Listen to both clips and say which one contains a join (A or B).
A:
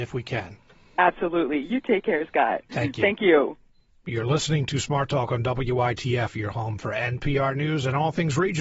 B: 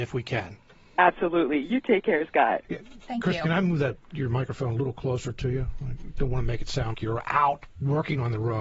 B